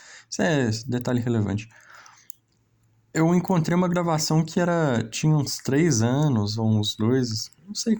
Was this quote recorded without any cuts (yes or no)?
yes